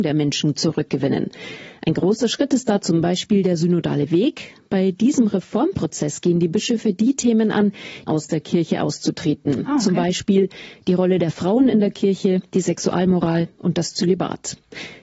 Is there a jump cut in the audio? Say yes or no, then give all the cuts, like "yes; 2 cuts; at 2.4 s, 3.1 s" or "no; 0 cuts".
yes; 1 cut; at 8.1 s